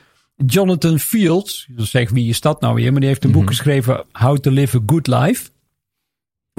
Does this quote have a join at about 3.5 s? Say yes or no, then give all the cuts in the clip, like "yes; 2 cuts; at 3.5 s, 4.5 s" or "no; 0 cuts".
no; 0 cuts